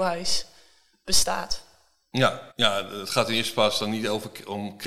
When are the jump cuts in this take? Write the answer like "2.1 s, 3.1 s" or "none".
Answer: 2.5 s